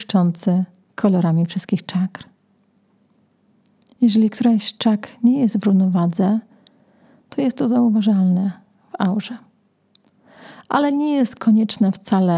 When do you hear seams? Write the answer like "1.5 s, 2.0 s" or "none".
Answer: none